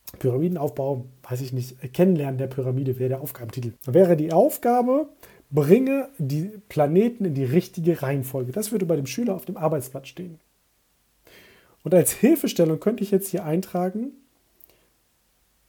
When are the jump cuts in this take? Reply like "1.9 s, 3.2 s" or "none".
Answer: 3.8 s